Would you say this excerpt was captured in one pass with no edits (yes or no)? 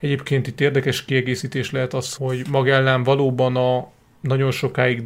no